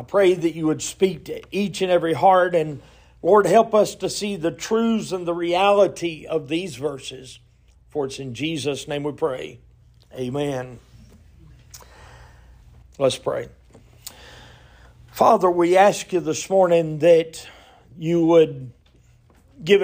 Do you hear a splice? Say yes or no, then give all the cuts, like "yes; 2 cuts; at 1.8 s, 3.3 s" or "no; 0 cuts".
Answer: yes; 1 cut; at 12.8 s